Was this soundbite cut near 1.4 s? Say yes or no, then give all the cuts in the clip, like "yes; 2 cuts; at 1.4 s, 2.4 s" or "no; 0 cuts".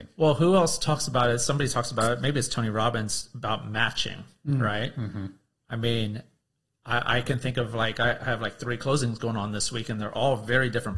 no; 0 cuts